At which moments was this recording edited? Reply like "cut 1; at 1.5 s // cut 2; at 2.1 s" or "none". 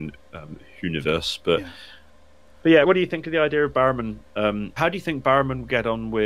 cut 1; at 2.8 s // cut 2; at 4.8 s